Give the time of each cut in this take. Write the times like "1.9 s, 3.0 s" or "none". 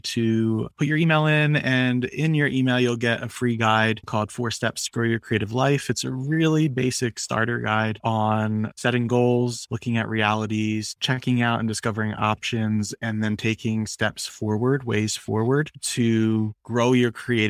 none